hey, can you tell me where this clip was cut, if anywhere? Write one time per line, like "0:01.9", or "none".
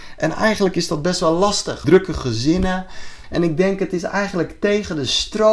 0:01.8
0:03.2